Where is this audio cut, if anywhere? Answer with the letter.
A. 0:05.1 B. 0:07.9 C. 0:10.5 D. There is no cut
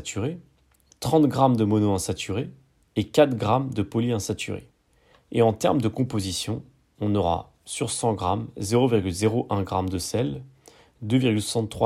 A